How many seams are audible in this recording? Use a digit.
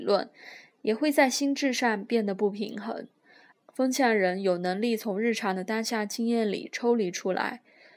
1